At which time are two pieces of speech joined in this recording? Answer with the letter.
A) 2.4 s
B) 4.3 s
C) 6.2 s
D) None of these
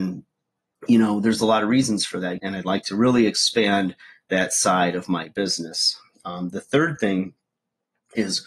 A